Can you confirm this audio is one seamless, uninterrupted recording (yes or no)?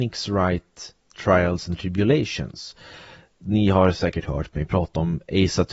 yes